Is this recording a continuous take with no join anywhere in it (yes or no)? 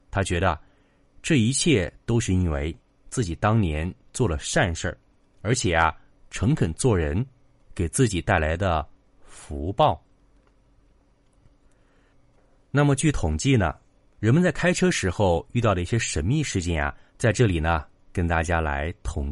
no